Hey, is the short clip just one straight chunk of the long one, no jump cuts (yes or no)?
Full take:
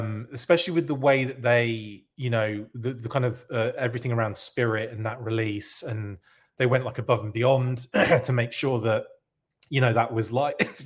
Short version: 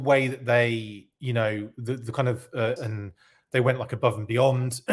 no